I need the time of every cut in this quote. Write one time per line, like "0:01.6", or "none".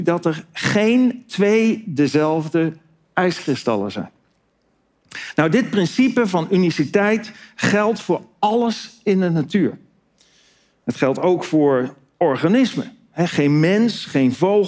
none